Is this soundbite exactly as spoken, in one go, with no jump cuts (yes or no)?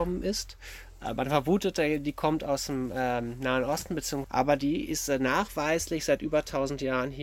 no